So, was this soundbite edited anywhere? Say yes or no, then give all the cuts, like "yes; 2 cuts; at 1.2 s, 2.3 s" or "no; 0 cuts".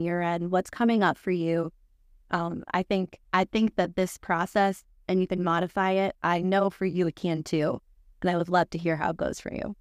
yes; 2 cuts; at 3.2 s, 6.1 s